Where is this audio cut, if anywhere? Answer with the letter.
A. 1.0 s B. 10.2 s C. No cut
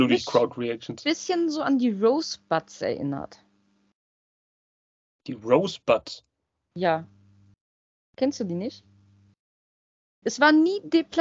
B